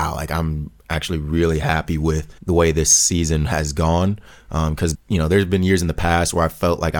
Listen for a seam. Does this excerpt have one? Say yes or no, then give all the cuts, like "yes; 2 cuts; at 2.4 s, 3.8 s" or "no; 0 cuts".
yes; 2 cuts; at 2.4 s, 4.9 s